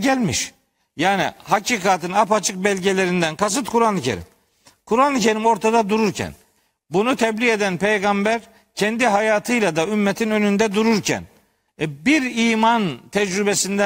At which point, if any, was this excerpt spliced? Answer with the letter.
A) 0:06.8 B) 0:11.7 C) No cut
B